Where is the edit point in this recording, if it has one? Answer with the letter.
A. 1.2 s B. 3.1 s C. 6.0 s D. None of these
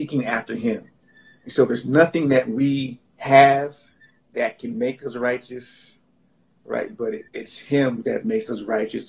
B